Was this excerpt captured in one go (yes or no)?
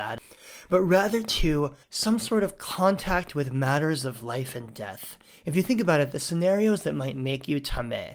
no